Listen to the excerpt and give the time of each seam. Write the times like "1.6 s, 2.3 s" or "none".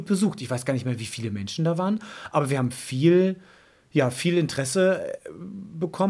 none